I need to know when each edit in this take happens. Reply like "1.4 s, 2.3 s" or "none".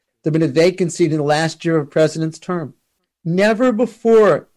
3.0 s